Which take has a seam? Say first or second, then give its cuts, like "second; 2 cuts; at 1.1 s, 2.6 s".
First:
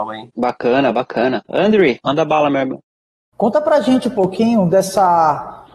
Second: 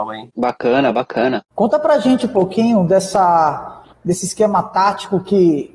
second; 1 cut; at 1.4 s